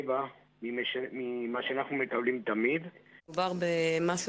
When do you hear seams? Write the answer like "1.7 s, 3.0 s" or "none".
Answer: 3.2 s